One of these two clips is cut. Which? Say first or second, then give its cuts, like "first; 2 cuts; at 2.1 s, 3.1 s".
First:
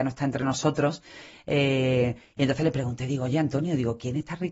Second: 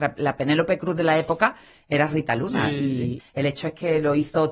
second; 1 cut; at 3.2 s